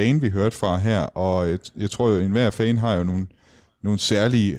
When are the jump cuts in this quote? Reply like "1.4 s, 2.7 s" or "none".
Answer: none